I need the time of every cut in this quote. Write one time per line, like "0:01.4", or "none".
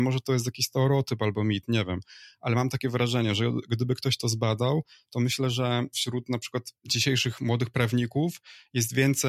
none